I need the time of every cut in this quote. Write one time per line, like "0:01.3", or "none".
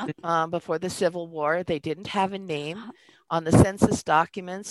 none